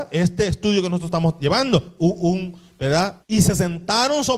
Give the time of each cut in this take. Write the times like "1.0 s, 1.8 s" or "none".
2.0 s, 3.2 s

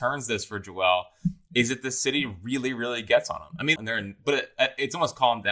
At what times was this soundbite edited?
3.8 s

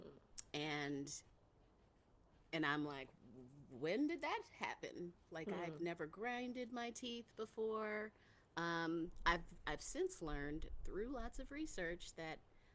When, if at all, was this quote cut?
none

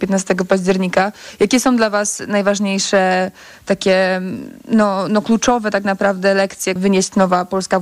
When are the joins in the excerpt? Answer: 6.8 s

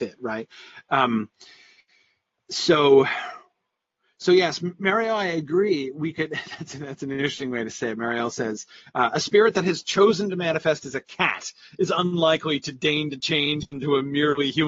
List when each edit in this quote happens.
none

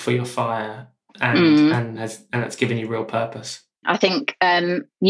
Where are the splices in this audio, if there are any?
3.8 s

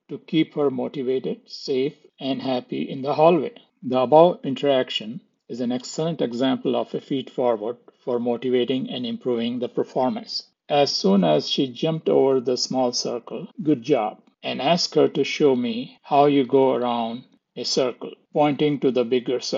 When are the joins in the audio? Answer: 10.5 s, 13.5 s

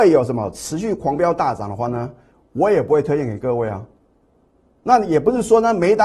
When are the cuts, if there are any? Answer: none

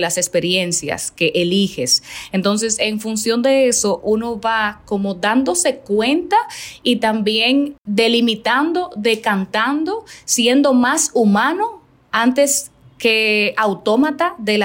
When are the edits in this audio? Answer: none

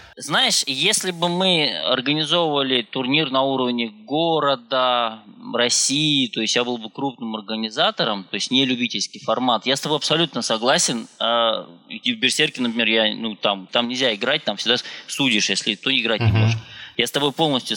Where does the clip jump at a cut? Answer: 13.7 s

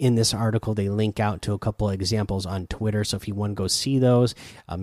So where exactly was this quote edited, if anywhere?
none

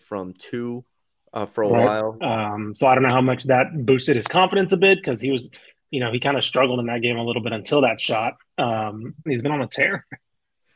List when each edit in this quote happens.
2.2 s, 9.3 s

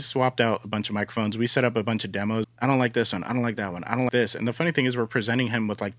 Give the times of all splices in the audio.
2.4 s, 4.1 s

